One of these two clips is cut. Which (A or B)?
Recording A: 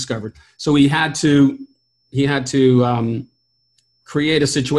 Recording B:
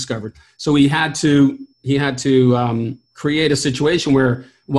B